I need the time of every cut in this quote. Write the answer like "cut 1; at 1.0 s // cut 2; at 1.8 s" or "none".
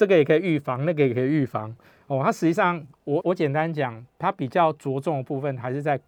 cut 1; at 3.2 s